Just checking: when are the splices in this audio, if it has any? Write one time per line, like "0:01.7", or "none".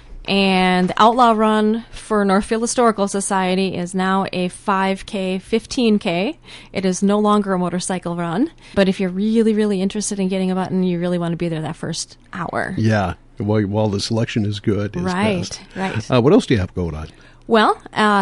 0:08.7